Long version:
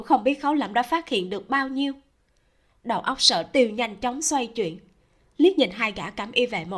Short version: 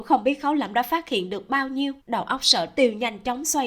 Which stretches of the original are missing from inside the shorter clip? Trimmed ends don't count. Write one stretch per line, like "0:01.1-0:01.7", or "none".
0:02.0-0:02.8